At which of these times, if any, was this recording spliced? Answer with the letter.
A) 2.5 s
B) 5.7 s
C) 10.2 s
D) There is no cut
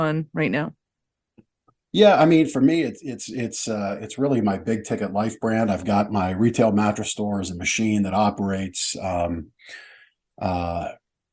D